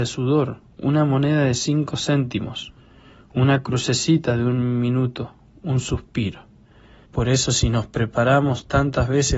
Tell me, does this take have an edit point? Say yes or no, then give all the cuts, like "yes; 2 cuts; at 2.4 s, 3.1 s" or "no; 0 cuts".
yes; 1 cut; at 7.1 s